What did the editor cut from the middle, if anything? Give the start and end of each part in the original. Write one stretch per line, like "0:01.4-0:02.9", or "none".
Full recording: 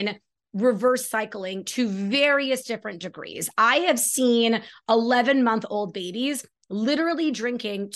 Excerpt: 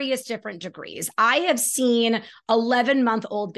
none